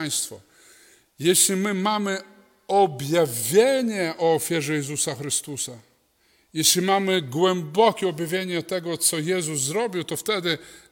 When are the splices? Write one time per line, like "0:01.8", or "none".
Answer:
none